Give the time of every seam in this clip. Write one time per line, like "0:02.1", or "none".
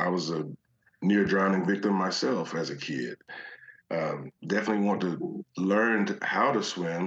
0:04.4